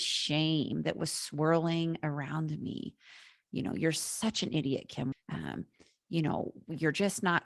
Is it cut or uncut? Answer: cut